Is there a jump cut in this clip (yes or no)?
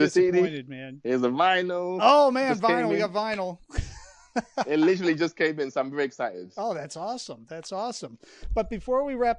no